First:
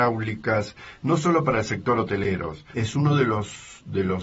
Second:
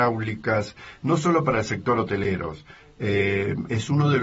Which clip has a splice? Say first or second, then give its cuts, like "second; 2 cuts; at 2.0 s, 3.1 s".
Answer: first; 1 cut; at 2.7 s